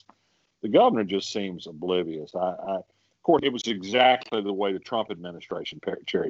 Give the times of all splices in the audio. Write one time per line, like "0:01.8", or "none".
0:03.4